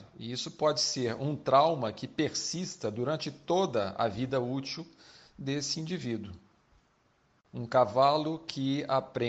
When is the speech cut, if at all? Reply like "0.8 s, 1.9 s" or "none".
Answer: 7.5 s